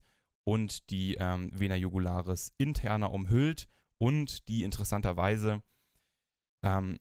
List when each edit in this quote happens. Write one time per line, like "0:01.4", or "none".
none